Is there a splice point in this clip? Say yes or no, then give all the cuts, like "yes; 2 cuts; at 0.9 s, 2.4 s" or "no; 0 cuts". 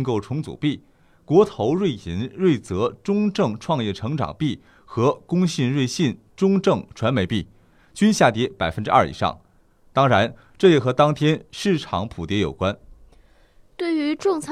no; 0 cuts